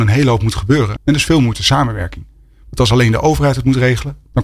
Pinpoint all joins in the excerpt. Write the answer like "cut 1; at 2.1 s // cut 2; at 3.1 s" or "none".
cut 1; at 1.0 s

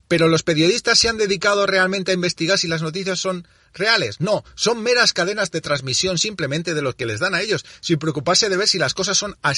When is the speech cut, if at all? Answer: none

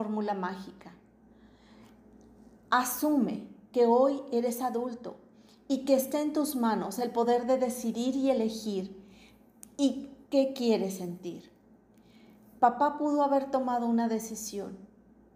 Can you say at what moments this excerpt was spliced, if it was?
none

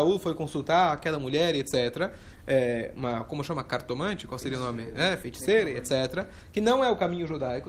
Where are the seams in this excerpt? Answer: none

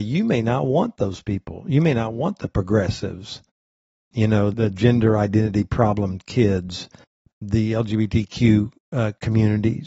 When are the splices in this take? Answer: cut 1; at 4.5 s

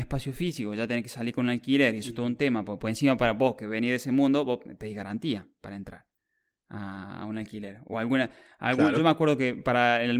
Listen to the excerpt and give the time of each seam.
none

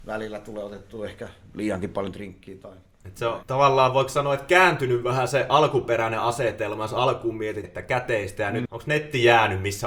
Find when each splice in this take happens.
cut 1; at 3.4 s // cut 2; at 7.6 s // cut 3; at 8.6 s

